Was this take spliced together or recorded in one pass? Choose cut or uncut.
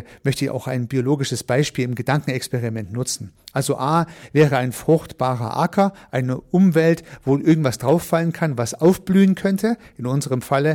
uncut